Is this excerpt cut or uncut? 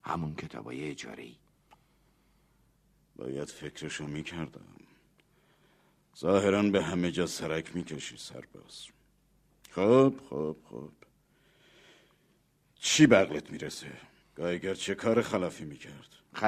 cut